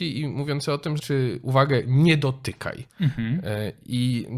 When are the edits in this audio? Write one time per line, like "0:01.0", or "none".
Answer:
0:01.0
0:02.9